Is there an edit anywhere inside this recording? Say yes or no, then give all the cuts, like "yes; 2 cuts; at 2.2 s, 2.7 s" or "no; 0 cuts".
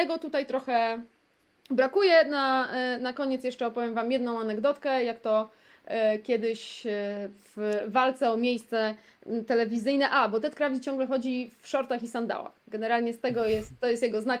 no; 0 cuts